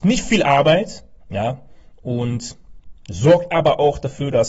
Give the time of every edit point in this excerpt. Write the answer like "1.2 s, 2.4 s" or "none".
1.2 s